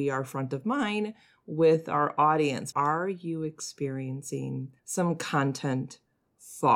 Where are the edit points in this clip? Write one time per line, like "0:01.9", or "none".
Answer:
0:02.7
0:04.8